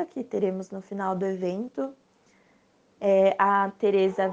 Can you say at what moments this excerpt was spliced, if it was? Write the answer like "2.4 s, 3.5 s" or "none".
none